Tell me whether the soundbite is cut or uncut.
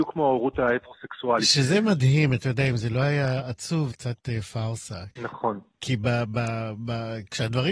cut